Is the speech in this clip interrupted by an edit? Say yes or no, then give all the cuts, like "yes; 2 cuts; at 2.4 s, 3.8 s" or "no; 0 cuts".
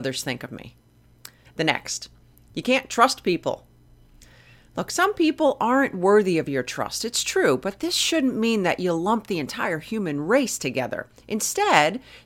yes; 1 cut; at 1.5 s